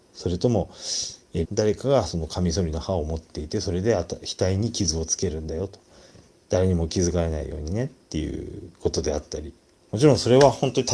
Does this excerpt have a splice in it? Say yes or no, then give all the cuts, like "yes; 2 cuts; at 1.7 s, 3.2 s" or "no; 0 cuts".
yes; 1 cut; at 1.4 s